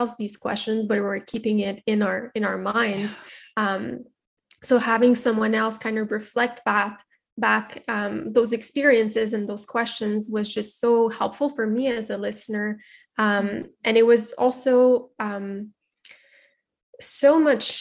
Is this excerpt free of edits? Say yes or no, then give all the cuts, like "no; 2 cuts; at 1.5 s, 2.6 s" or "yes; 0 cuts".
yes; 0 cuts